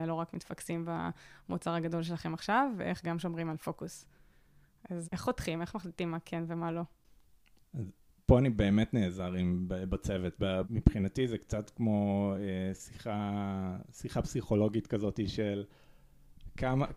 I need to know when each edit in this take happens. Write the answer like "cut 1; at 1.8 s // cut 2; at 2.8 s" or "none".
cut 1; at 5.0 s // cut 2; at 10.6 s